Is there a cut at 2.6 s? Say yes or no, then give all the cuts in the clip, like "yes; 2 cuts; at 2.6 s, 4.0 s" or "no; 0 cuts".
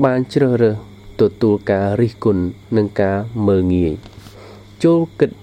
yes; 1 cut; at 2.6 s